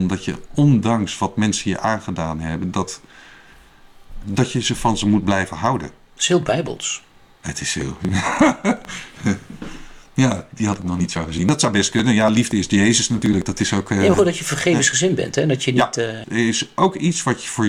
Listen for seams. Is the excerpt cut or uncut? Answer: cut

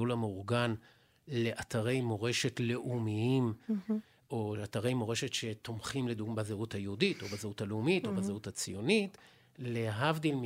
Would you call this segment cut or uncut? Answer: uncut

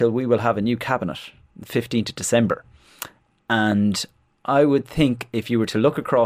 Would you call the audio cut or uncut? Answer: uncut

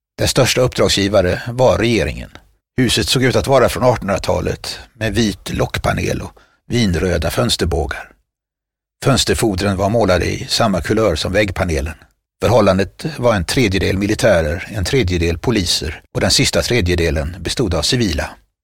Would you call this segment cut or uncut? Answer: cut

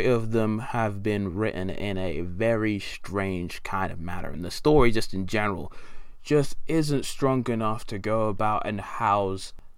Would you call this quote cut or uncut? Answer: uncut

